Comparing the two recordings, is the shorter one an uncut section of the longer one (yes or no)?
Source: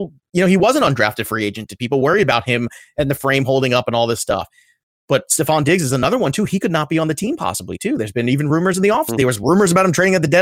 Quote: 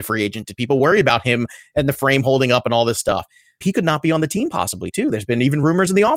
no